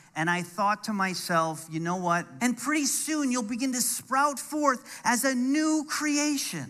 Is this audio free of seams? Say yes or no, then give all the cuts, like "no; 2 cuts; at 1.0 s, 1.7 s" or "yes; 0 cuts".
no; 1 cut; at 2.4 s